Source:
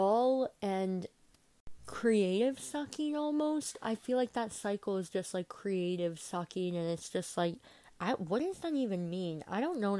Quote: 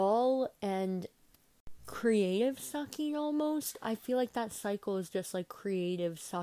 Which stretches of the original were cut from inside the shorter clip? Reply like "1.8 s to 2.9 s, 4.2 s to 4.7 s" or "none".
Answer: none

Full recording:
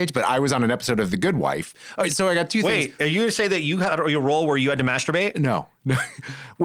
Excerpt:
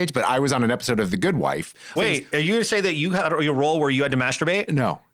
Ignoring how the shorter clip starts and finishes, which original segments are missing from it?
2.0 s to 2.6 s

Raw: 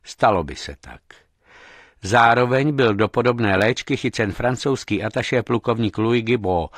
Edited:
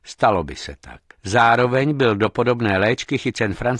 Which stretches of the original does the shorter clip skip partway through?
1.1 s to 1.9 s

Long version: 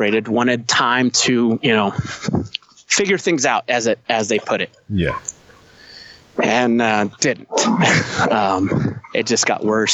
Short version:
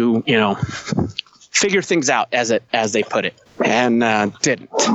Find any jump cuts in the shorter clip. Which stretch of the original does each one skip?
4.8 s to 6.2 s

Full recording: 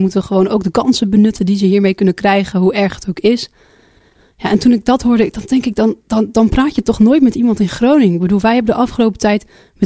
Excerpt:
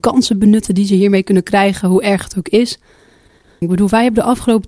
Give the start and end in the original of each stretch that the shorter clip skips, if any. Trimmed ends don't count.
4.3 s to 8.1 s

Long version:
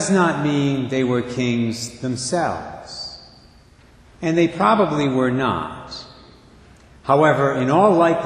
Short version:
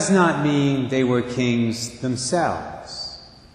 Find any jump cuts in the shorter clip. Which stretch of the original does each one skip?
none

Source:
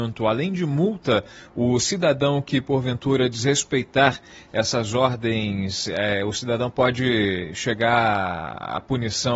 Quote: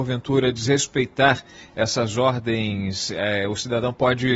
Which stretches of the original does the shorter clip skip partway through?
none

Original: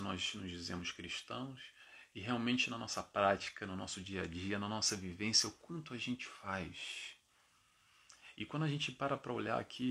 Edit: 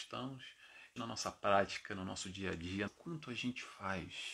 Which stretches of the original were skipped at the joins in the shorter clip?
2.1 s to 2.7 s, 4.6 s to 5.5 s

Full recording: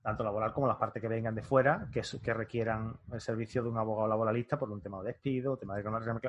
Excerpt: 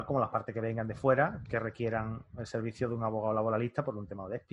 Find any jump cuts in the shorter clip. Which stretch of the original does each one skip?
1.9 s to 2.2 s

